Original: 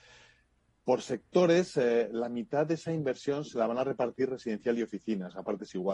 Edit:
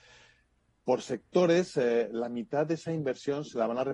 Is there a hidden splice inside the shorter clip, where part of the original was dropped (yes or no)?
no